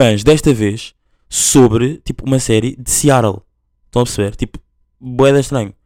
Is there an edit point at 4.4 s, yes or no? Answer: no